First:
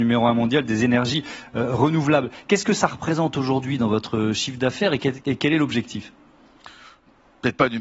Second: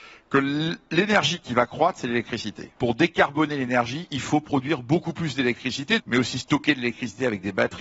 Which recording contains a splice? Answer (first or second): second